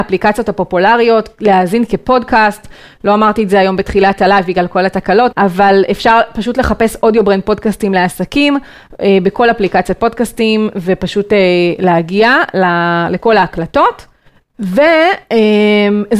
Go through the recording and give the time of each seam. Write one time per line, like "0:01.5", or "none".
0:05.3
0:14.4